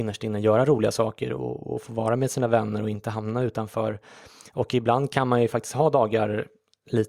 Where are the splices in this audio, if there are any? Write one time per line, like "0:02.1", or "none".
none